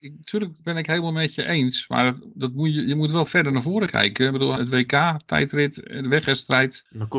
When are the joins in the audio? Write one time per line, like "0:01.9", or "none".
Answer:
0:03.3
0:04.6